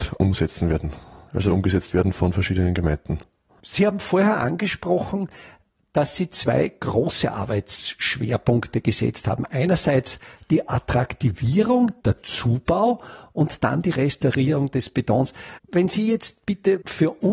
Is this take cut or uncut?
cut